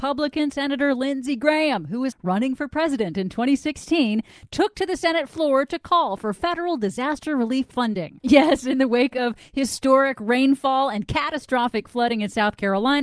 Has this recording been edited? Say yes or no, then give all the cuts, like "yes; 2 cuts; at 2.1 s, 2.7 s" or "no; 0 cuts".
yes; 2 cuts; at 2.1 s, 8.2 s